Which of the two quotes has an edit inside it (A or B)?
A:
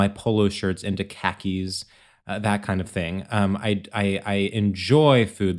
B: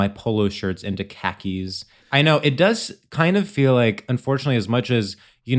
B